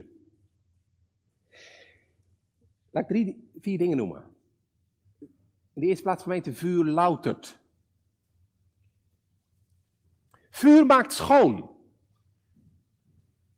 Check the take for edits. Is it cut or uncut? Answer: uncut